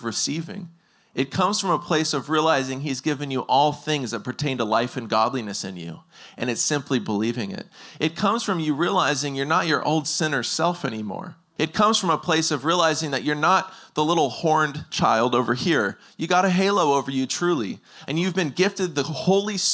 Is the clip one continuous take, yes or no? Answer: no